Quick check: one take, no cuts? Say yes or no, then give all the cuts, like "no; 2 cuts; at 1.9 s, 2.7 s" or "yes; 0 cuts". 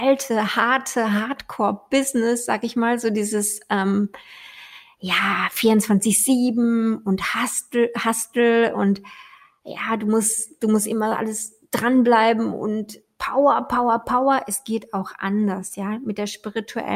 yes; 0 cuts